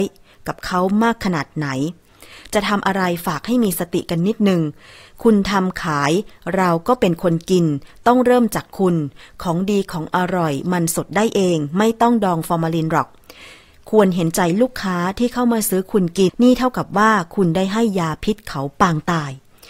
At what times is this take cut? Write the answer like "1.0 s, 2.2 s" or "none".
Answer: 16.3 s